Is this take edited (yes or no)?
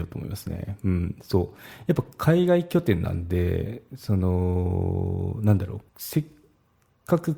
yes